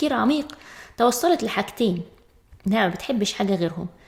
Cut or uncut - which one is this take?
uncut